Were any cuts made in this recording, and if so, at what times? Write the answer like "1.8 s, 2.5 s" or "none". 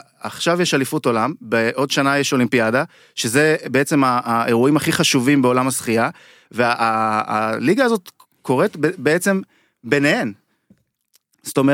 none